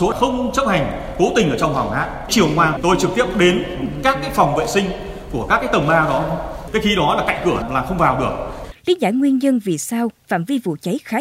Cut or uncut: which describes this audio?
cut